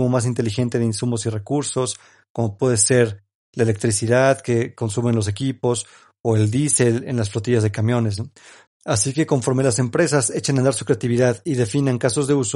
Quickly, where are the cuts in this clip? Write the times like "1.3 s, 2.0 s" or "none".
8.7 s